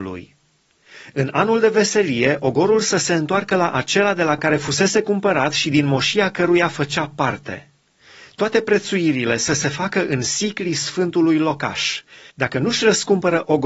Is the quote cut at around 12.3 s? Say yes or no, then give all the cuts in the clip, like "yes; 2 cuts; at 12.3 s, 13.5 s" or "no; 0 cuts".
yes; 1 cut; at 12.3 s